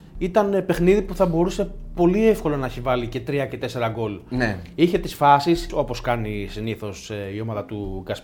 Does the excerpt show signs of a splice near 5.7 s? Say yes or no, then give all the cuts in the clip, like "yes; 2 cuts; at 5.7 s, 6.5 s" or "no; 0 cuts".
yes; 1 cut; at 5.7 s